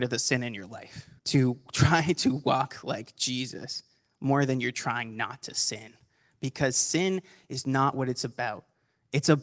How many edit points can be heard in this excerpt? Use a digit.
1